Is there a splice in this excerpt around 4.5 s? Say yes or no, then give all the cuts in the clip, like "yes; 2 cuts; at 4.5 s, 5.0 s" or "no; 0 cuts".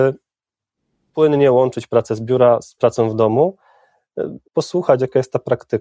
yes; 2 cuts; at 2.8 s, 4.5 s